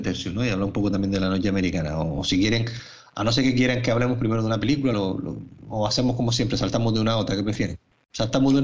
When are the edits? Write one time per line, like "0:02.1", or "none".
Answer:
0:04.9